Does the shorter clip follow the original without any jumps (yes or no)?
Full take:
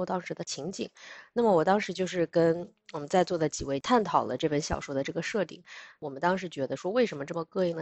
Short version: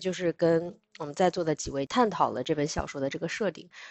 yes